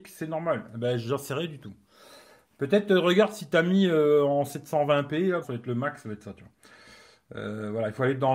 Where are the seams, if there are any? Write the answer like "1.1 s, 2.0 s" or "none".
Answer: 5.4 s